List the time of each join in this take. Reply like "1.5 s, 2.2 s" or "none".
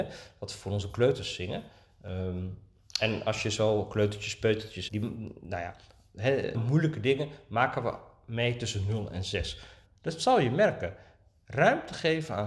4.9 s, 6.5 s, 9.8 s